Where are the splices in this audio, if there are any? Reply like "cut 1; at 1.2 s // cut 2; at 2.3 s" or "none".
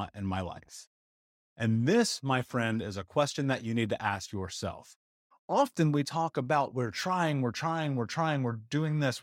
cut 1; at 5.3 s

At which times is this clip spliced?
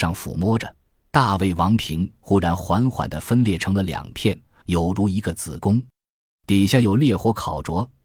cut 1; at 4.6 s

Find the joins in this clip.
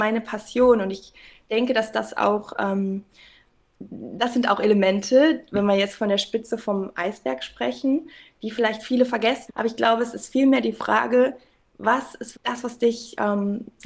cut 1; at 9.5 s // cut 2; at 12.3 s

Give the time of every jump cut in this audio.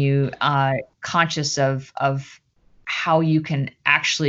cut 1; at 0.9 s

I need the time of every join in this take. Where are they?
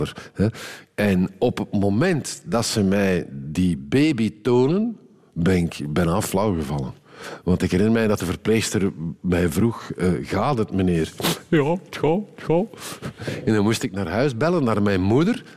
none

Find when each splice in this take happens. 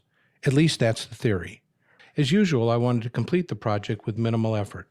cut 1; at 2.0 s

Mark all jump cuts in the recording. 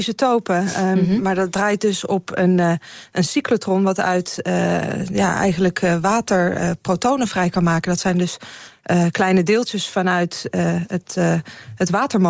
none

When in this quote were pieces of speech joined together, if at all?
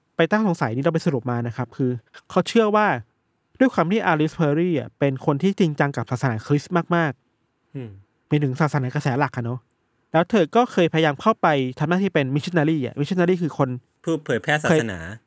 none

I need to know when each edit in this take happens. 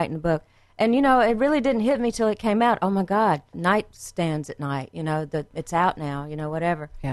cut 1; at 3.5 s

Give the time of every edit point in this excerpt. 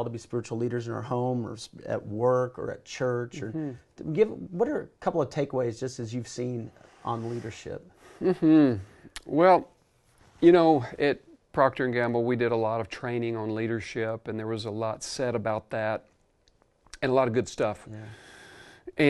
none

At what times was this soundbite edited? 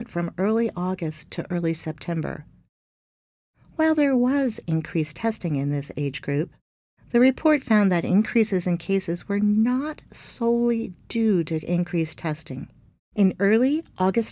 cut 1; at 13.0 s

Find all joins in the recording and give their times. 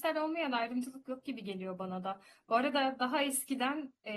none

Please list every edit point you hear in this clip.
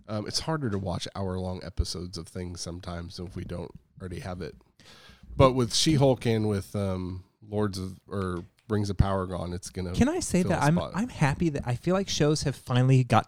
none

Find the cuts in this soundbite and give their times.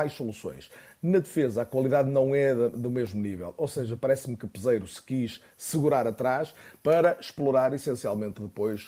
none

